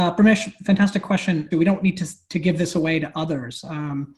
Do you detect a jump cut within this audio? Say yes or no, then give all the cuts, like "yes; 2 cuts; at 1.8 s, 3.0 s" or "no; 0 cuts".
yes; 1 cut; at 1.5 s